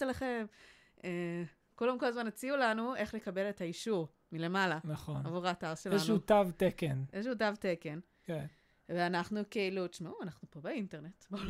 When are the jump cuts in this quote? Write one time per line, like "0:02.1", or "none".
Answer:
none